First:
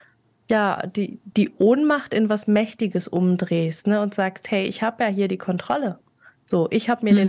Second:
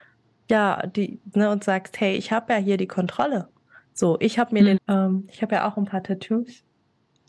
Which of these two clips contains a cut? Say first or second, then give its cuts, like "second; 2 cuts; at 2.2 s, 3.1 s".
second; 2 cuts; at 1.3 s, 4.8 s